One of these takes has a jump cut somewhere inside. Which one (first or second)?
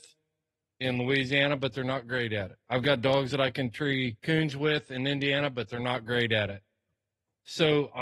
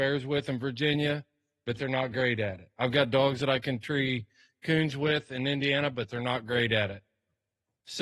first